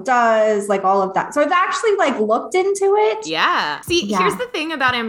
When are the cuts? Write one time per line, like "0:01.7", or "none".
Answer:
0:03.8